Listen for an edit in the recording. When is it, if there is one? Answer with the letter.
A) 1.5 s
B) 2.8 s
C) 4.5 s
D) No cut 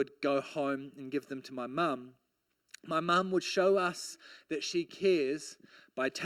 D